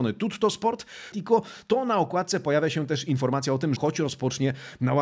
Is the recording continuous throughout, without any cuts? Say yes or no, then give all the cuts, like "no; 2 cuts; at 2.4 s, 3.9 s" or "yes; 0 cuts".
no; 2 cuts; at 1.1 s, 3.8 s